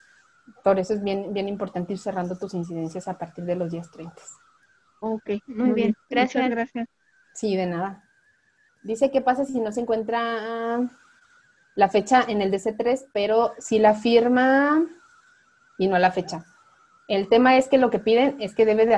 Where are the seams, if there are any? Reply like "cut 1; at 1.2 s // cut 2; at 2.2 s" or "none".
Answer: cut 1; at 8.7 s